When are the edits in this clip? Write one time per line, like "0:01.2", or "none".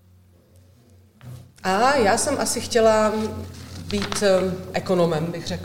none